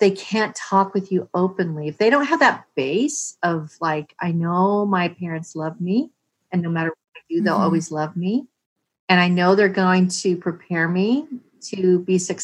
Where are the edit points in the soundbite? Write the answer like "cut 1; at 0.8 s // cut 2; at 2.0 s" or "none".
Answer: none